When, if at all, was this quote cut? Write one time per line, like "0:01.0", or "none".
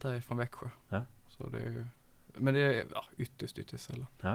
none